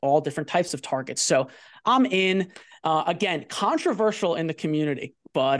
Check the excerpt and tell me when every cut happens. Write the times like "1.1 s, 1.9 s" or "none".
none

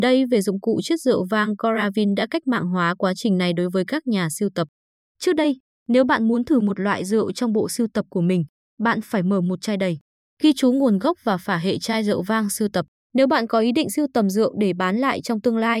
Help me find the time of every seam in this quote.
10.3 s

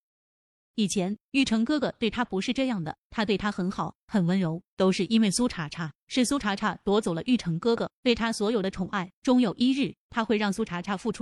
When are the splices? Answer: 9.1 s

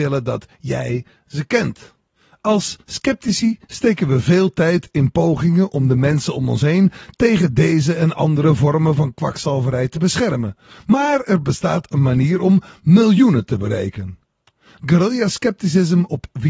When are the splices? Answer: none

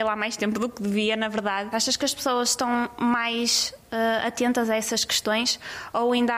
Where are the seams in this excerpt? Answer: 1.7 s

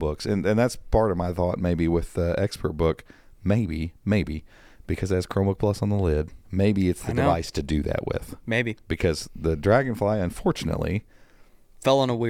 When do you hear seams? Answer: 6.4 s

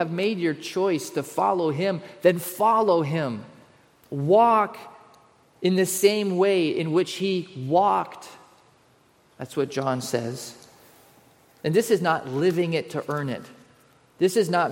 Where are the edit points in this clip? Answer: none

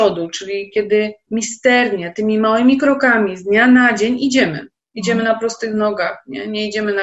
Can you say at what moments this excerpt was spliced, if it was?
4.9 s

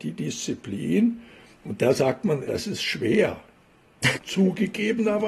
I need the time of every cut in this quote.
2.5 s, 4.2 s

